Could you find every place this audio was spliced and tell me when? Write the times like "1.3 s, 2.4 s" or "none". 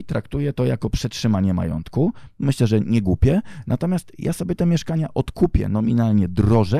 none